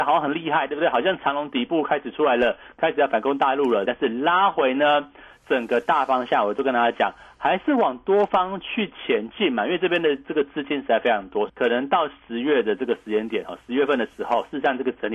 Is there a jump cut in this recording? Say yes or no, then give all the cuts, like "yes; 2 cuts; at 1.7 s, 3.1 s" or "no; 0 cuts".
yes; 2 cuts; at 3.9 s, 11.5 s